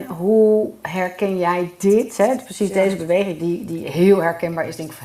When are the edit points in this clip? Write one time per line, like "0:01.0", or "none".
none